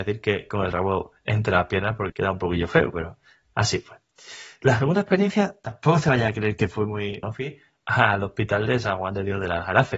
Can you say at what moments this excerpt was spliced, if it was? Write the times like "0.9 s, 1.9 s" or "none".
2.1 s, 7.2 s